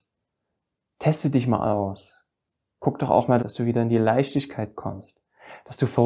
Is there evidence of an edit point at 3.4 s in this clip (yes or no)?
yes